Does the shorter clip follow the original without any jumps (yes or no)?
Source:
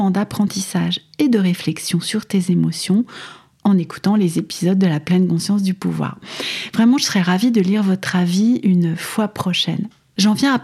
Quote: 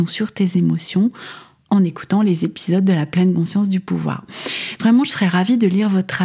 yes